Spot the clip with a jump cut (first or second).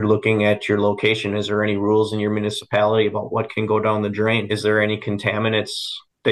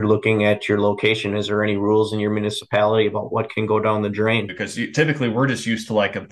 second